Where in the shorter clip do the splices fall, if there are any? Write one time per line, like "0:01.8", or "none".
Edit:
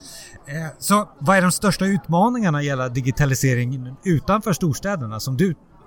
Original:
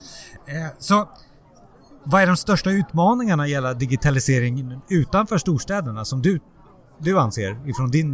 0:01.1